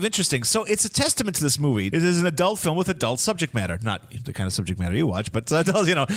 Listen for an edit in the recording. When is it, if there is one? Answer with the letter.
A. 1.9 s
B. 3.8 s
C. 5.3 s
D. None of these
A